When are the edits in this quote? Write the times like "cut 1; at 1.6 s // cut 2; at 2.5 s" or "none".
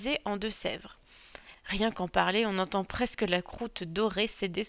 cut 1; at 1.5 s